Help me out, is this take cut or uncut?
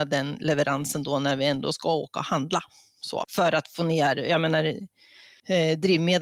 cut